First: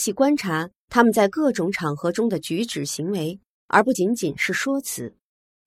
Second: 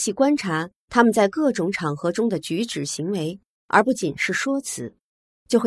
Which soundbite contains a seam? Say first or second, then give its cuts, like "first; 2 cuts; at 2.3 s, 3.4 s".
second; 1 cut; at 3.9 s